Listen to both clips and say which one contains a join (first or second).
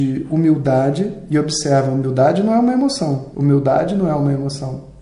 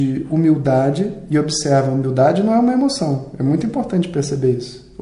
first